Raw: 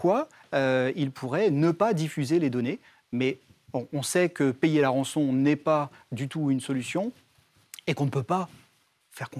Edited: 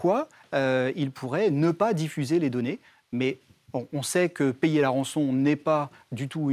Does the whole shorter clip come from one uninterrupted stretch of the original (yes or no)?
yes